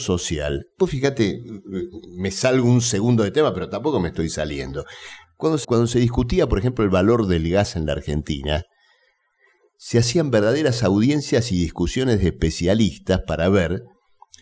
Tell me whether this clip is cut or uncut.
cut